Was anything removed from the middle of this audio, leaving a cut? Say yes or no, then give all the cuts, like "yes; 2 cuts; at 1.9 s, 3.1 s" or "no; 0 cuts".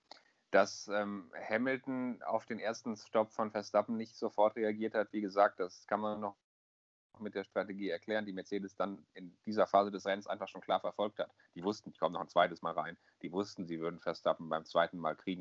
no; 0 cuts